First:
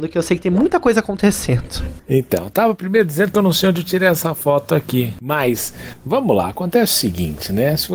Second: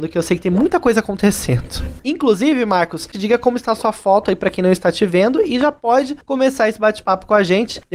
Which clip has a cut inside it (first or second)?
second